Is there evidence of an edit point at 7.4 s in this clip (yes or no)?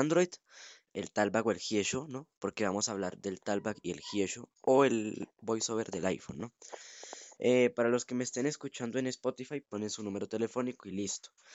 yes